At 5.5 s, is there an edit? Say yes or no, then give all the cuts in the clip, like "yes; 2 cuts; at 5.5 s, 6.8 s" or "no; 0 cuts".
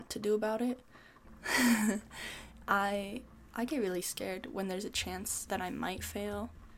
yes; 2 cuts; at 1.2 s, 5.5 s